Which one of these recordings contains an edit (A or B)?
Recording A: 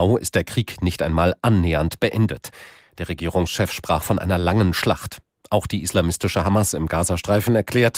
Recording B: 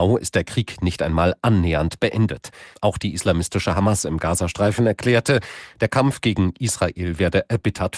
B